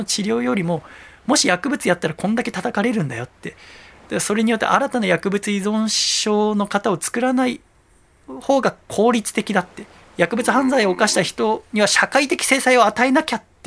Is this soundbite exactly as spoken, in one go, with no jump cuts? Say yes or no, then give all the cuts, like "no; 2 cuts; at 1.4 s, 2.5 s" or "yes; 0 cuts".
yes; 0 cuts